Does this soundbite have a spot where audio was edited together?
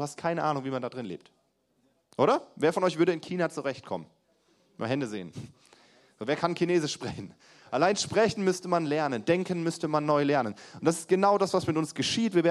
no; 0 cuts

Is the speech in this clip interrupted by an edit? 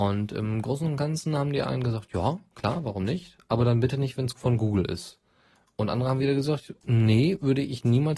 no; 0 cuts

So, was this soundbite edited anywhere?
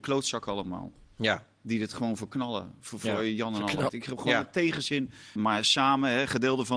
yes; 2 cuts; at 3.9 s, 5.4 s

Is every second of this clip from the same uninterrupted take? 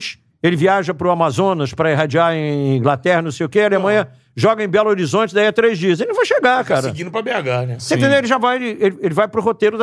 yes; 0 cuts

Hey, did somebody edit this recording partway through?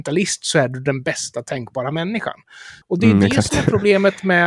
yes; 1 cut; at 2.8 s

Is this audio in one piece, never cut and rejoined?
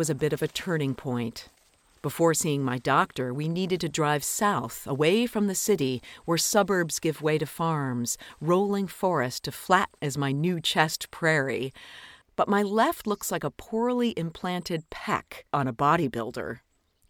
no; 1 cut; at 12.2 s

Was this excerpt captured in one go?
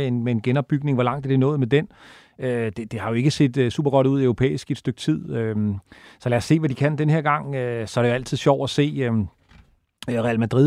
yes; 0 cuts

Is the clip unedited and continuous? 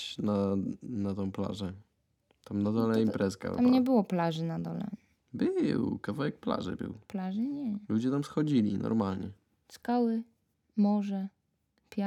yes; 0 cuts

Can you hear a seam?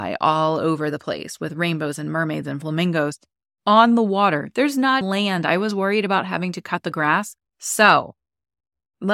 yes; 2 cuts; at 5.0 s, 7.4 s

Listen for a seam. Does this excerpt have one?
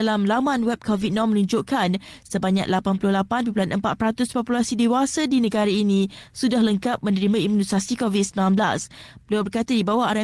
yes; 1 cut; at 9.2 s

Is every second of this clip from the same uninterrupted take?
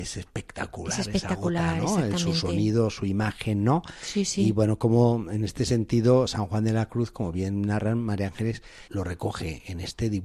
no; 1 cut; at 8.9 s

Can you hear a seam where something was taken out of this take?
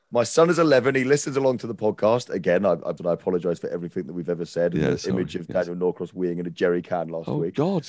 yes; 1 cut; at 3.0 s

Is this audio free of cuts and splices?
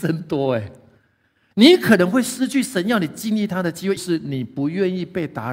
no; 2 cuts; at 1.5 s, 4.0 s

